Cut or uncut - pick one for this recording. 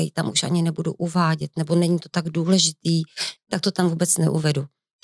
cut